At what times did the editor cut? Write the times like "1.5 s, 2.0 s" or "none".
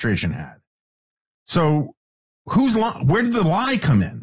none